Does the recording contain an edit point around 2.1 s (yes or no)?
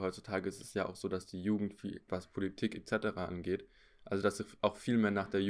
yes